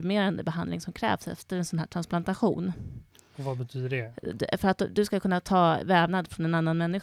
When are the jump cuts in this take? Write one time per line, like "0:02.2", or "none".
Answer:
none

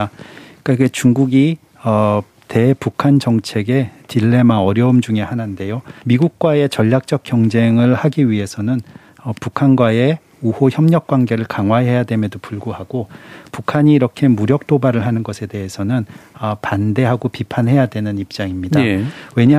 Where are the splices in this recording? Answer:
0:06.0

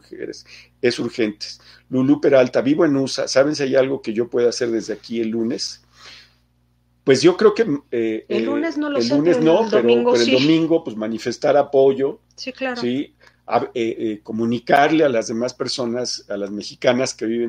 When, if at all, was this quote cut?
none

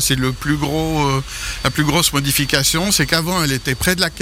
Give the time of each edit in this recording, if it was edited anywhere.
none

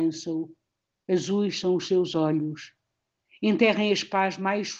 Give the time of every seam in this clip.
none

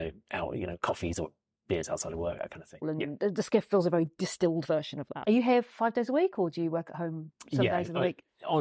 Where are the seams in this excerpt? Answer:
0:02.8
0:05.2

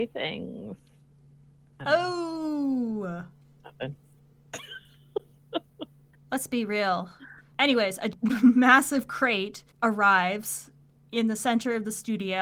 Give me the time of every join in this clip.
0:07.5
0:09.7

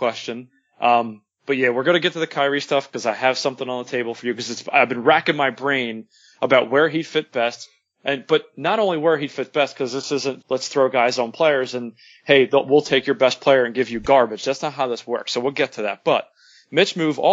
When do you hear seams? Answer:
0:10.4

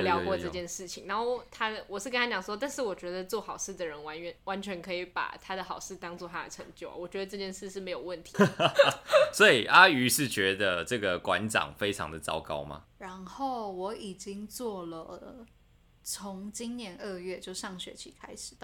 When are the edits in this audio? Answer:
0:08.3
0:12.8

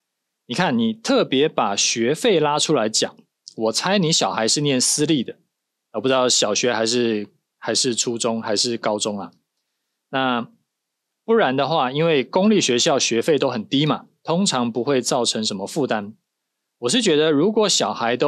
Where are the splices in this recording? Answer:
none

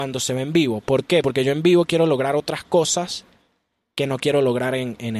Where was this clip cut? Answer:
none

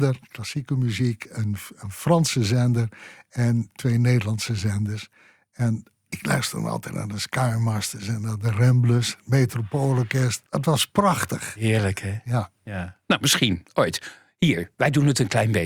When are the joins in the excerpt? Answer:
0:10.5

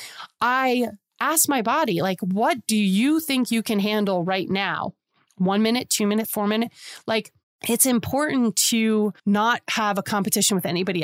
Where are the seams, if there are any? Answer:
0:06.2
0:09.2

